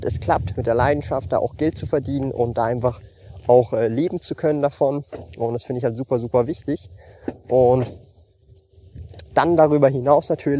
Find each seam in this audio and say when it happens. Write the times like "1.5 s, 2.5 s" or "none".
none